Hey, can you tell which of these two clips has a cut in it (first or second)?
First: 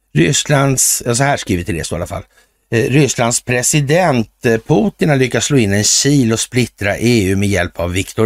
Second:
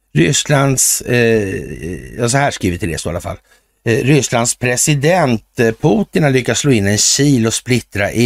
first